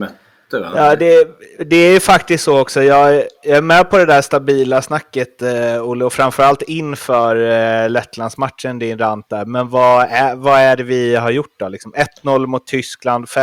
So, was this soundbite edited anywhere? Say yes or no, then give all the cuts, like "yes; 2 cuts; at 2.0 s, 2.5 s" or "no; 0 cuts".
no; 0 cuts